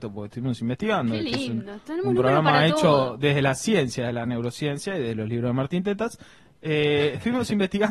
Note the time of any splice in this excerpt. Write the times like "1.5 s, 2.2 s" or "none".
none

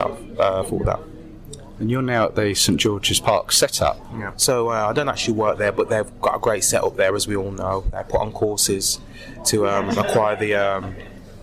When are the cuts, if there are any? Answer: 4.3 s

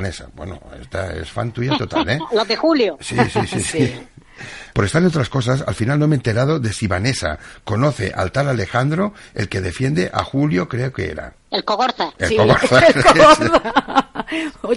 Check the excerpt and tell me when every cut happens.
4.7 s, 11.4 s

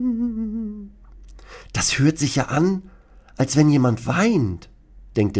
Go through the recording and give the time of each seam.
none

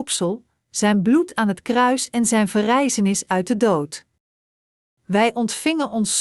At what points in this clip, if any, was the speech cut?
none

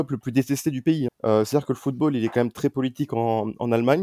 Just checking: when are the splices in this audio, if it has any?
1.1 s

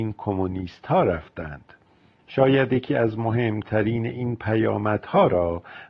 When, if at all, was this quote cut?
2.2 s

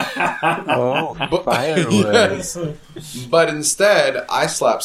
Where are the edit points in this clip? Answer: none

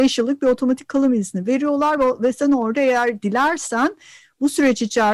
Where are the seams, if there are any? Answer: none

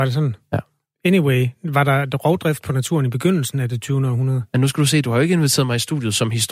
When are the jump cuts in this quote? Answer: none

